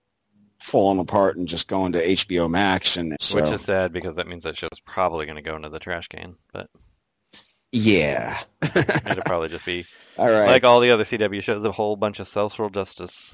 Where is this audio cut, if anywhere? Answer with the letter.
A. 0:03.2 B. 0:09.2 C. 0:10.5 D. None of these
A